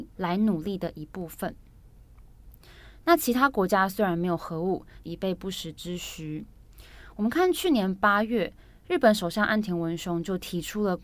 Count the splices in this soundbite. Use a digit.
2